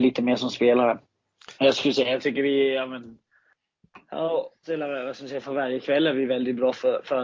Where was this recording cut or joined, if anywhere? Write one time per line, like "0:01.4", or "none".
0:01.6
0:04.6

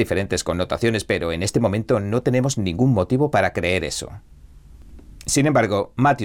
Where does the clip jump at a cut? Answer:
0:05.2

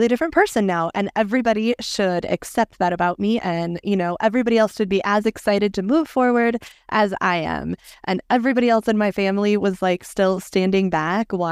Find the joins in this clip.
none

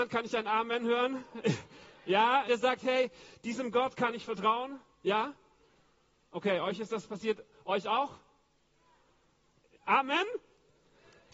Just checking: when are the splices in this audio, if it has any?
0:02.5

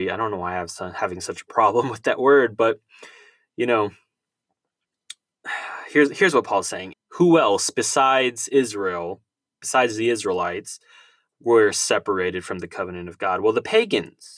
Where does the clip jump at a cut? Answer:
0:06.9

